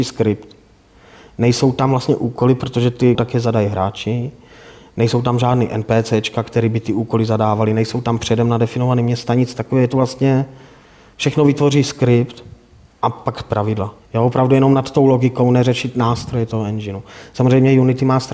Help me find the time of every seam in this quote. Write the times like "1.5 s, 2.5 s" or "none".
3.2 s, 14.0 s